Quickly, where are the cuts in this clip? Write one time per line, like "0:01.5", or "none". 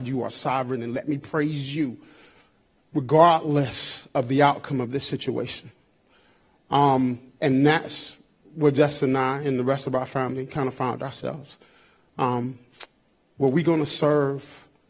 none